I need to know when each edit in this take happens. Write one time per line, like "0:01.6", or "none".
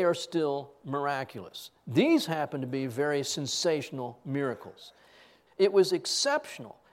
0:05.5